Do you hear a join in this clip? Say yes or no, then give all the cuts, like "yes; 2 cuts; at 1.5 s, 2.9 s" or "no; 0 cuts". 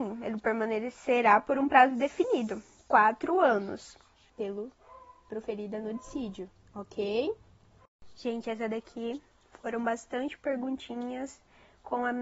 yes; 2 cuts; at 2.8 s, 4.3 s